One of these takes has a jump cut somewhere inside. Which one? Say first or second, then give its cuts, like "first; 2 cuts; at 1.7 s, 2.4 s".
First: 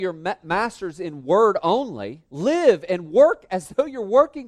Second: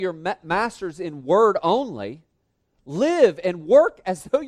first; 1 cut; at 2.3 s